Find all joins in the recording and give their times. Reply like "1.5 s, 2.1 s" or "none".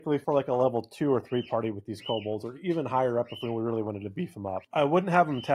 none